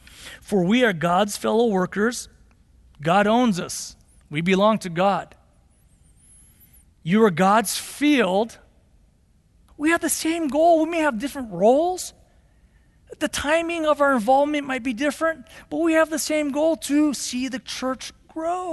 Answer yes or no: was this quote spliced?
yes